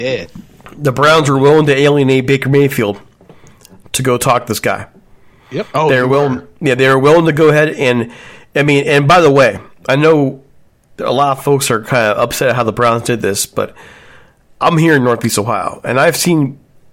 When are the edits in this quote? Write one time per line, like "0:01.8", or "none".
none

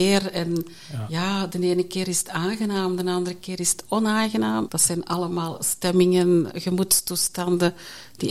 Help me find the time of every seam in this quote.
0:04.7

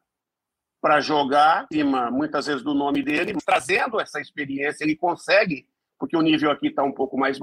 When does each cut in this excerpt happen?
none

